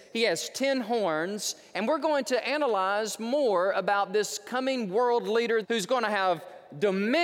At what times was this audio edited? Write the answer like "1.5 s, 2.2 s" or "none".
5.6 s